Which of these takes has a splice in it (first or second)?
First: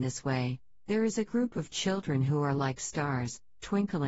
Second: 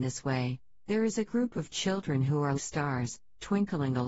second